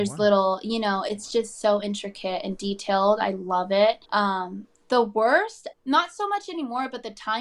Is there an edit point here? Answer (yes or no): yes